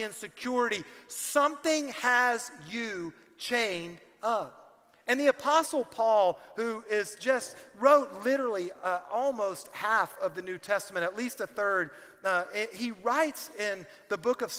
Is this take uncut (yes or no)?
yes